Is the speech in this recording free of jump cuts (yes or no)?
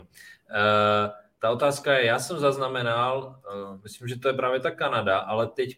yes